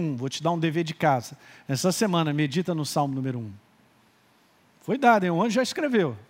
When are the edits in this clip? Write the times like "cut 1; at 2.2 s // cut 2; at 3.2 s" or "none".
none